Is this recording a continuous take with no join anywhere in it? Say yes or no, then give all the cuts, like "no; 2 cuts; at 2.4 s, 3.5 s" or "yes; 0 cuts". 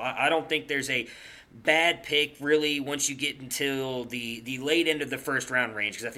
yes; 0 cuts